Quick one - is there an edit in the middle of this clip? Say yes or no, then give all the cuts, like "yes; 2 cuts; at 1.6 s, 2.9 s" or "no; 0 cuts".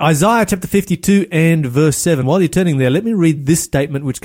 no; 0 cuts